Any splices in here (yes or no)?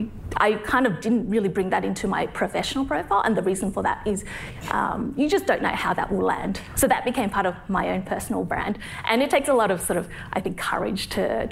yes